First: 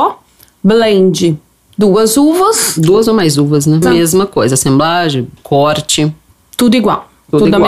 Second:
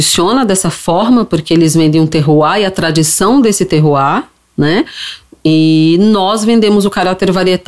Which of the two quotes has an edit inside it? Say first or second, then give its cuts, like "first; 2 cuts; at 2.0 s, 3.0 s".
first; 2 cuts; at 3.8 s, 5.4 s